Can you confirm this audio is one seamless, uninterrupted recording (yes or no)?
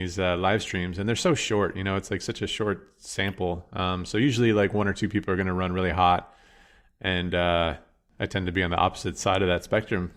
yes